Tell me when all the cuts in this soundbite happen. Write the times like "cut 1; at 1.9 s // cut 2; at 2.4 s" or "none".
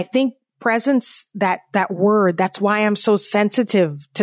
none